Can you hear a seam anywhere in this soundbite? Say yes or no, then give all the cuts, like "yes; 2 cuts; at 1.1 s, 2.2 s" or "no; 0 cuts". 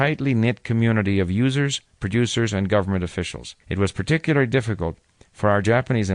yes; 1 cut; at 3.6 s